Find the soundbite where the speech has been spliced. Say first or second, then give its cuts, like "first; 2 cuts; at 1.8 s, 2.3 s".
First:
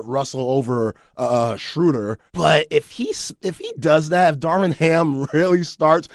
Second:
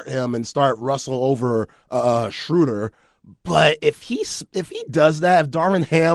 first; 1 cut; at 2.3 s